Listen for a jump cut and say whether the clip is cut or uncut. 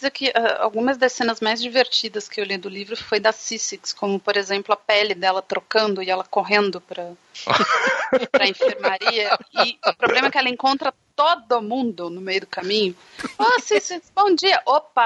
uncut